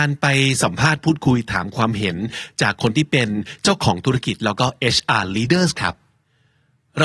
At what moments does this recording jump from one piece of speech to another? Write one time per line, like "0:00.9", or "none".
none